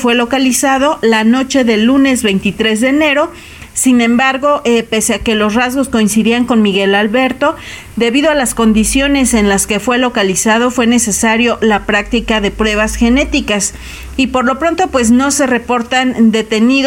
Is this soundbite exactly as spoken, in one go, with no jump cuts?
yes; 0 cuts

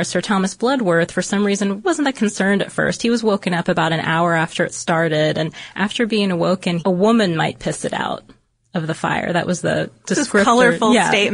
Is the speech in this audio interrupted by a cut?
yes; 2 cuts; at 1.8 s, 6.8 s

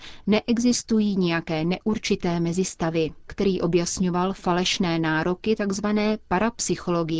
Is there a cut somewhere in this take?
yes; 1 cut; at 3.3 s

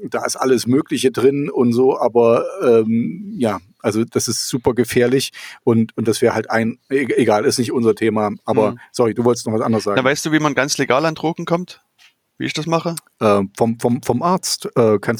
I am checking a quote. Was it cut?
no; 0 cuts

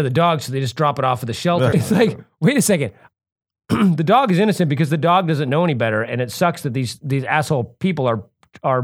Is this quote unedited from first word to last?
no; 2 cuts; at 1.7 s, 3.1 s

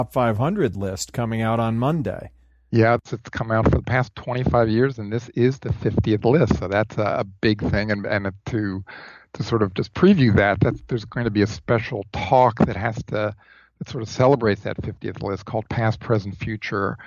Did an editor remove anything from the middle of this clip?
no; 0 cuts

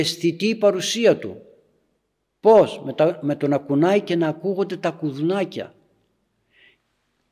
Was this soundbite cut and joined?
no; 0 cuts

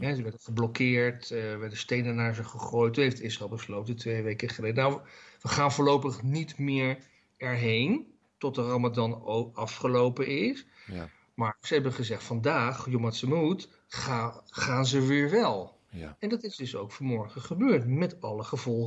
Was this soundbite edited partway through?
no; 0 cuts

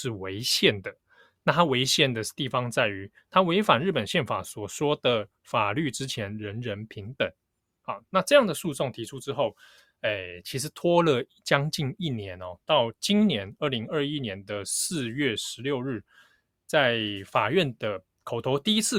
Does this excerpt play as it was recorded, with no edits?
yes; 0 cuts

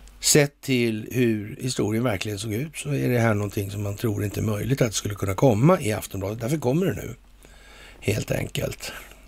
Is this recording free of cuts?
yes; 0 cuts

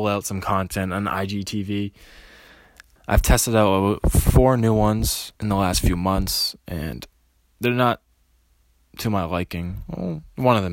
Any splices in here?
yes; 2 cuts; at 3.0 s, 5.4 s

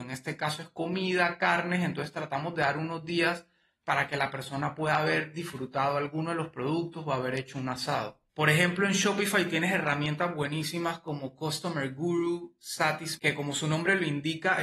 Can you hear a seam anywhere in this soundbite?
yes; 2 cuts; at 8.3 s, 13.2 s

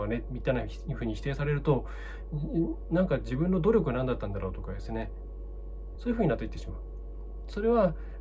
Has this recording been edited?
yes; 1 cut; at 6.0 s

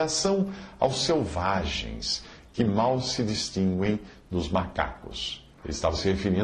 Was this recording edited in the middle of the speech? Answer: yes; 1 cut; at 5.5 s

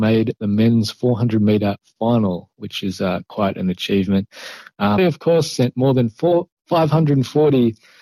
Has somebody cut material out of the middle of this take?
yes; 1 cut; at 5.0 s

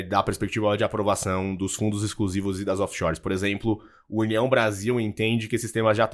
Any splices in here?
no; 0 cuts

